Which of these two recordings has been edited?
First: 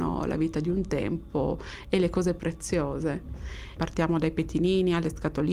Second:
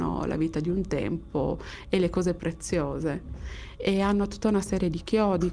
first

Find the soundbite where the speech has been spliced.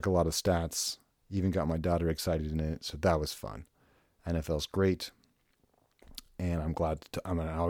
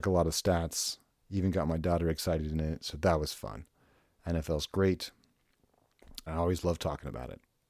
second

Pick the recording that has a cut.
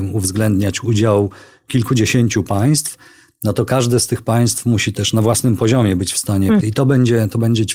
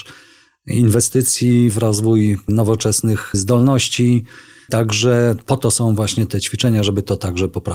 first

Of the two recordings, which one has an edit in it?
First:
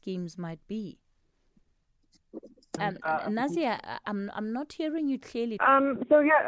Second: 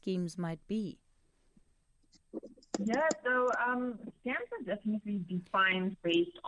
first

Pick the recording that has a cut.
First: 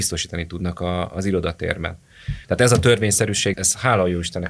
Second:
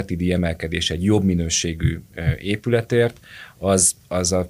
first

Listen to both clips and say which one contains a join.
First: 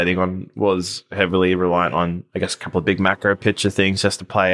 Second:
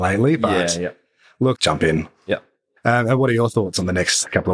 second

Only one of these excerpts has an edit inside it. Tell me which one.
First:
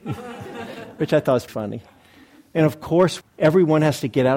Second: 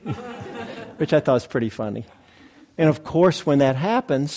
first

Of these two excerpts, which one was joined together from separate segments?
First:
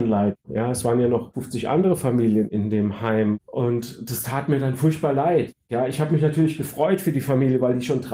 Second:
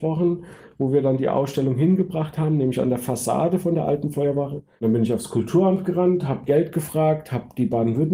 second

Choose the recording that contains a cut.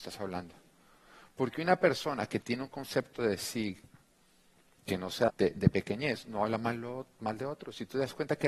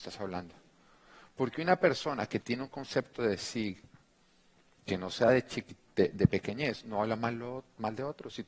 first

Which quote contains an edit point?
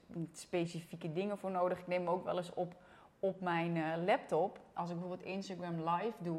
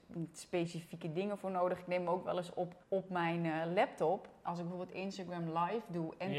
second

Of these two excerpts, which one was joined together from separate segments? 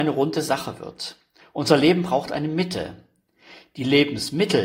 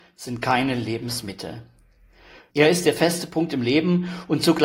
second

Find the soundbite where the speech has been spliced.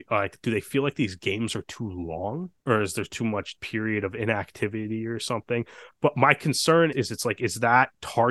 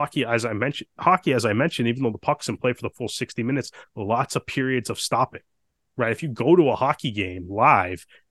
first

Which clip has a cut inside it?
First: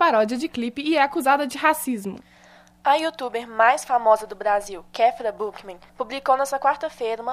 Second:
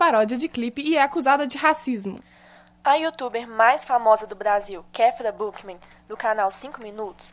first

